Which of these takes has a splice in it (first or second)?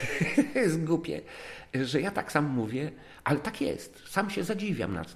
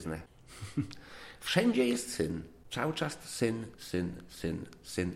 second